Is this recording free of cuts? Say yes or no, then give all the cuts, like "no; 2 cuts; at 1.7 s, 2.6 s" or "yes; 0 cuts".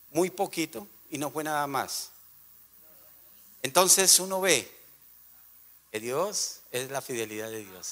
yes; 0 cuts